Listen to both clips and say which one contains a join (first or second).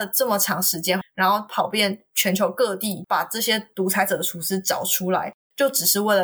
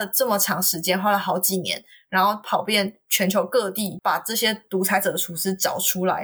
first